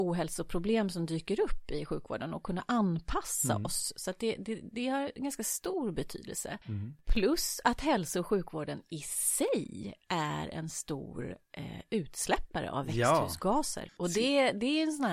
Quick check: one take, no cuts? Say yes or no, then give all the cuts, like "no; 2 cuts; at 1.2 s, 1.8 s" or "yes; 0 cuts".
no; 2 cuts; at 6.6 s, 13.9 s